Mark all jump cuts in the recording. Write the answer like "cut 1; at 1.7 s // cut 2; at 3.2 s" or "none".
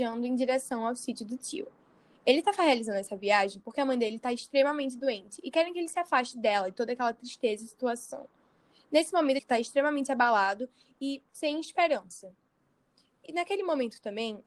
cut 1; at 9.4 s